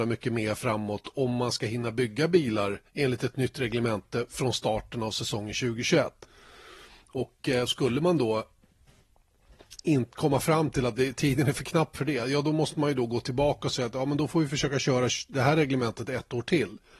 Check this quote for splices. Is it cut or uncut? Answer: uncut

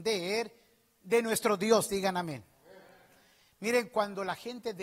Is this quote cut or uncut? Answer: uncut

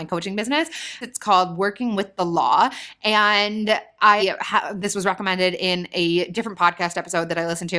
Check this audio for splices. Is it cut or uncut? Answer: cut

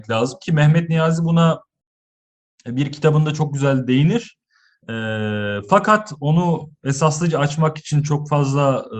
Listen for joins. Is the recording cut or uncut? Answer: uncut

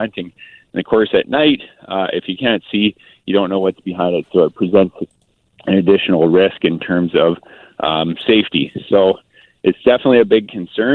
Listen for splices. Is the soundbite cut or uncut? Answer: uncut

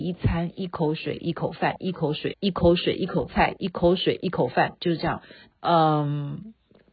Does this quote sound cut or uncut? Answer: cut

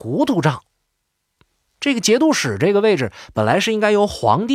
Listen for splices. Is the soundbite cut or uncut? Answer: uncut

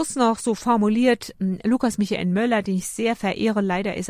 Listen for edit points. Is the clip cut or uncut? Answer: uncut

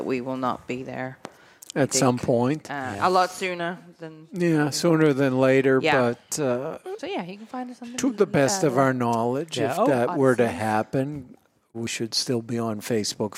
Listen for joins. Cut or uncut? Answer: uncut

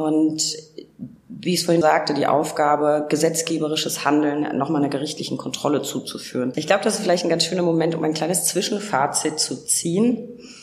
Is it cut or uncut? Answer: cut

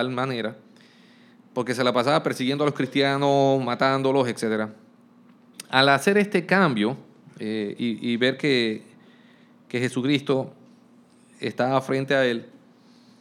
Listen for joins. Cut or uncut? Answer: uncut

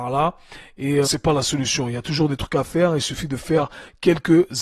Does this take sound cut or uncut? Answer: cut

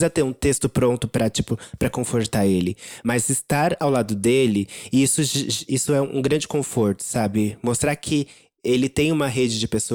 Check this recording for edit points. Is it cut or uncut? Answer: uncut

